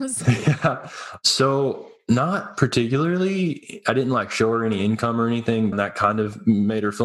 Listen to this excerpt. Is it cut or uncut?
cut